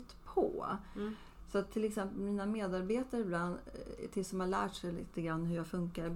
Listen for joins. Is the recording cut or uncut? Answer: uncut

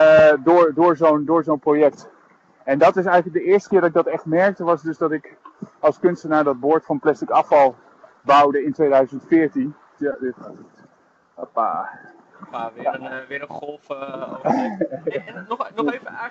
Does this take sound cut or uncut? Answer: cut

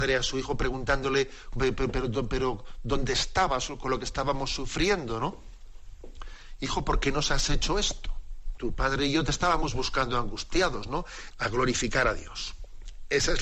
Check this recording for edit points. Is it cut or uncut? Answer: cut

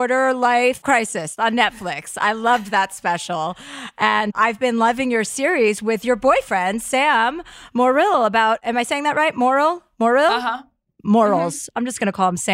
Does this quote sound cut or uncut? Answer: uncut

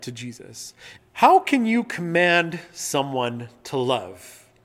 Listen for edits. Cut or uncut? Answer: cut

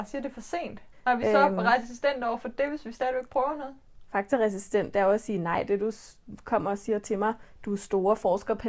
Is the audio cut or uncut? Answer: cut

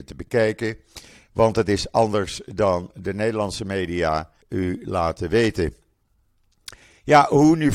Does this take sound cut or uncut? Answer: cut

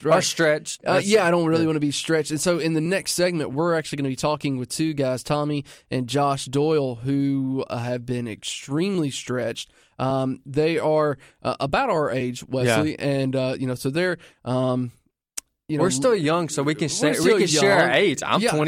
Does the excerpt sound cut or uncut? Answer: uncut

